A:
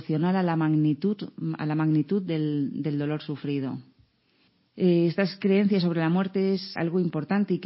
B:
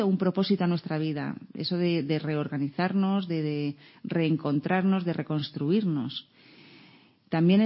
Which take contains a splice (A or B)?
A